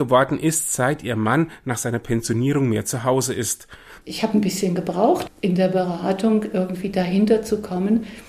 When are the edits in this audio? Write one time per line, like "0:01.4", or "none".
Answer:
0:04.0
0:05.3